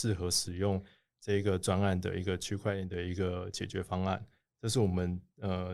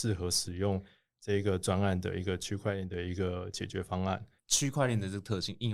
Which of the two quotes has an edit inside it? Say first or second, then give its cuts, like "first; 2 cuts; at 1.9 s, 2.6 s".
second; 1 cut; at 4.4 s